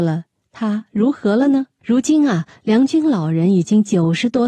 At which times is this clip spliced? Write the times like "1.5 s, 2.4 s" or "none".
1.8 s